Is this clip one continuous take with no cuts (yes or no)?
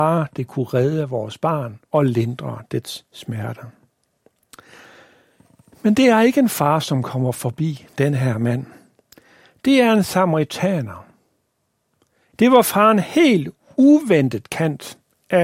no